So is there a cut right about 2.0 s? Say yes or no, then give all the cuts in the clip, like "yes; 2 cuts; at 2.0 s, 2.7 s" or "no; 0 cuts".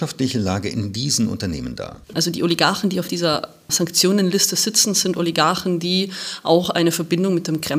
yes; 1 cut; at 2.0 s